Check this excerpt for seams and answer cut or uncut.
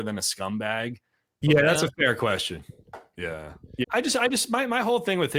cut